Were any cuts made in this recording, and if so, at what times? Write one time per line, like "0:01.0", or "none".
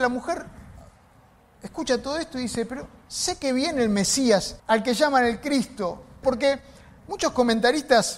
0:04.6
0:06.2